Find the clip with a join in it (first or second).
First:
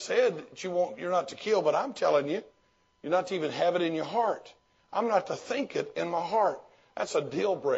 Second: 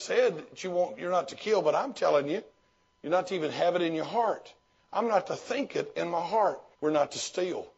second